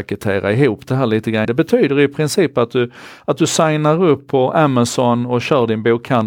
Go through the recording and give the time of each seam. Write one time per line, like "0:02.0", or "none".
0:01.5

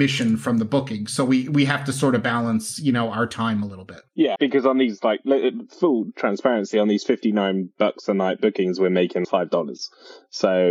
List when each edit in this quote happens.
0:04.4
0:09.2

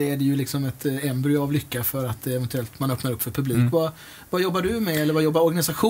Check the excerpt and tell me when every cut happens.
none

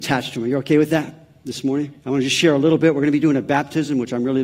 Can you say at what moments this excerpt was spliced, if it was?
0:02.0

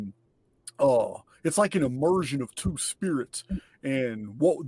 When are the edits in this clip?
none

